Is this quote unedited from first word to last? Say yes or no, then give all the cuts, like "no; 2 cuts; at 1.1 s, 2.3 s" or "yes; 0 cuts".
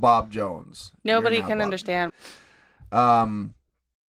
no; 1 cut; at 2.1 s